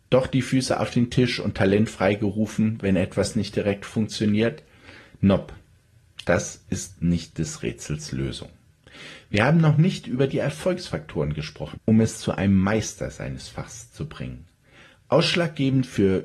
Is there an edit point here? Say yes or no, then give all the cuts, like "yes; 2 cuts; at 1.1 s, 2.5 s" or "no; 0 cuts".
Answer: yes; 1 cut; at 11.7 s